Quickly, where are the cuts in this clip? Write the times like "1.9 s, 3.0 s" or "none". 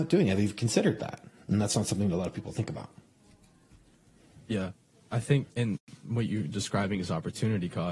5.5 s